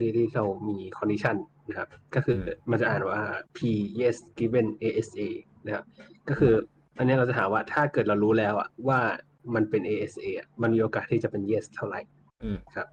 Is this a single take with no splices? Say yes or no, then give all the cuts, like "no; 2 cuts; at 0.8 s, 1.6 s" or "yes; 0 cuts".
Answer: no; 1 cut; at 3.5 s